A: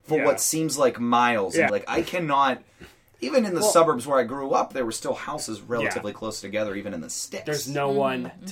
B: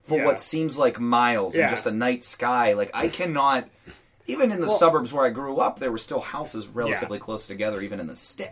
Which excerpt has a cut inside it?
A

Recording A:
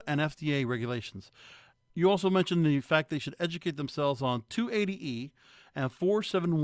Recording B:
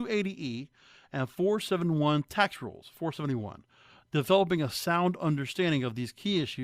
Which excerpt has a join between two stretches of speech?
A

